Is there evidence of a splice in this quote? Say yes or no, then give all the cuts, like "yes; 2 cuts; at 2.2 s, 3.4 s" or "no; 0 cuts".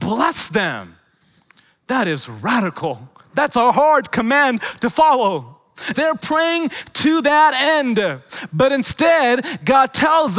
yes; 1 cut; at 5.9 s